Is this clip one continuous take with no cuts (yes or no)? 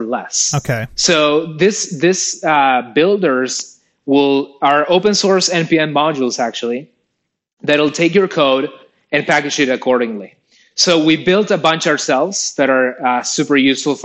yes